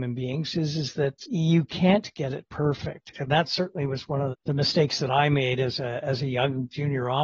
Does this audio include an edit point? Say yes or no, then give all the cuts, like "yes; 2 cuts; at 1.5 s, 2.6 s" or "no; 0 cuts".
yes; 3 cuts; at 1.2 s, 3.1 s, 4.3 s